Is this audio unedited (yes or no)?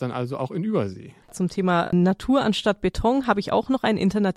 no